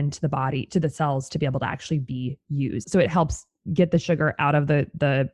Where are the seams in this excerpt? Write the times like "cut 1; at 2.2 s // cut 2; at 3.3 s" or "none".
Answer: cut 1; at 2.8 s